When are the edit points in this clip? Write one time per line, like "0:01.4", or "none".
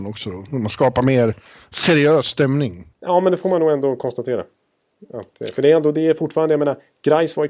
0:02.9